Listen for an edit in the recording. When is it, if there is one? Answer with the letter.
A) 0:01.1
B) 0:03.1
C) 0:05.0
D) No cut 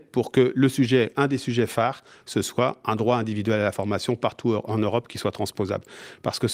D